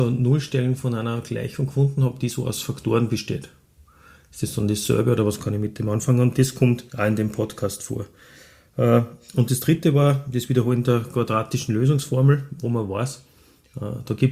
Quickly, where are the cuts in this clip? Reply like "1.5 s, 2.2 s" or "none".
6.9 s